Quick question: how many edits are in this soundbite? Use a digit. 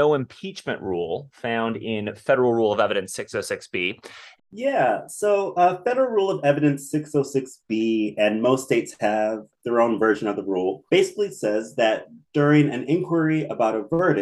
2